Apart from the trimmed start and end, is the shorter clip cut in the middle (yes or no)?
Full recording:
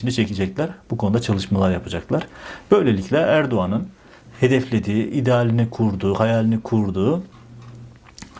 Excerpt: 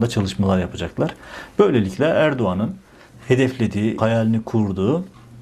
yes